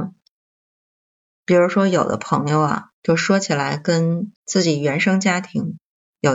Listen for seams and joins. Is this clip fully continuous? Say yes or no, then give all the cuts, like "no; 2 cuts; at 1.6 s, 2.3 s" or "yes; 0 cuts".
no; 2 cuts; at 3.0 s, 4.4 s